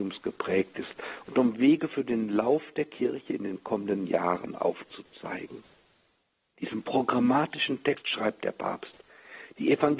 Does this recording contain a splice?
no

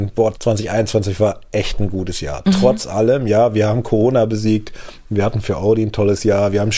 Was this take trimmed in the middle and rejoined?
no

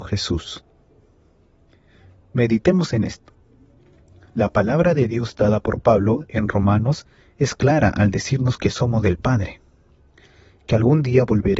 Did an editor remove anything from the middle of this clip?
no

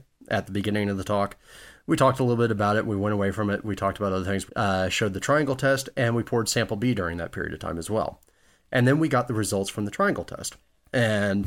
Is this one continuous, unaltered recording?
no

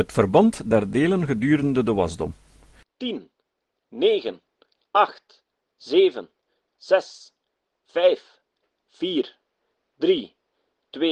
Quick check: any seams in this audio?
no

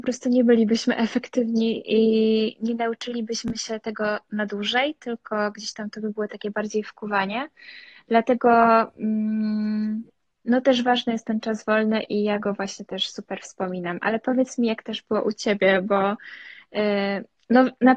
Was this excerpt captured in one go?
yes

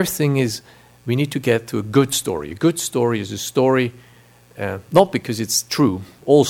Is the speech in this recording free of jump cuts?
yes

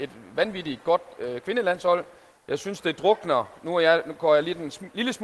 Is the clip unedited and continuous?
yes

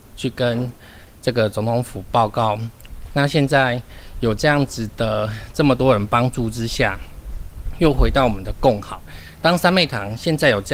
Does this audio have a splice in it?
yes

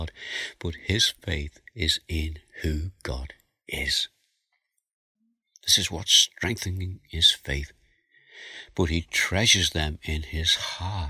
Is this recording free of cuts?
no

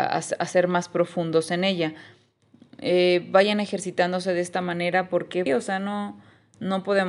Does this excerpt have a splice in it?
yes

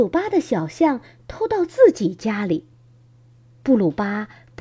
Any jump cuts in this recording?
no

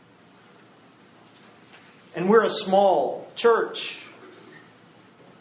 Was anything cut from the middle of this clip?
yes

